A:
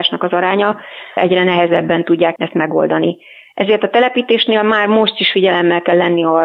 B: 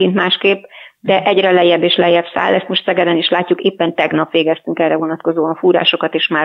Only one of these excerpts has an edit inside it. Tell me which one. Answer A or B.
A